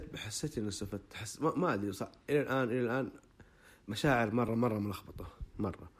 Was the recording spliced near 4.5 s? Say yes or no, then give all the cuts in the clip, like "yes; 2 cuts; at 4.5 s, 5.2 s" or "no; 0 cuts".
yes; 1 cut; at 4.5 s